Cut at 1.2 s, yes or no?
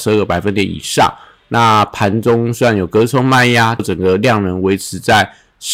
no